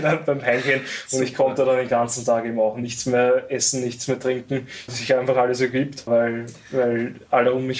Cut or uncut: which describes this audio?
cut